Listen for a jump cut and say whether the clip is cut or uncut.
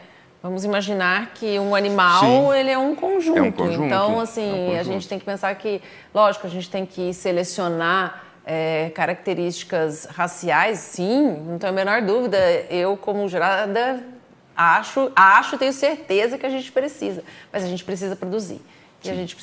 uncut